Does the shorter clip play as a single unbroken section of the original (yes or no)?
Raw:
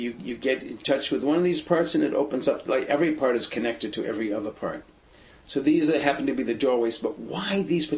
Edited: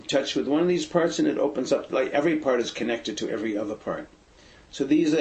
yes